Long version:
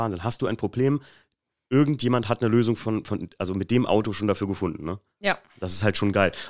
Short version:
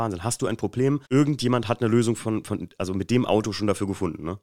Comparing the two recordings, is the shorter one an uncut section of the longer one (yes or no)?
no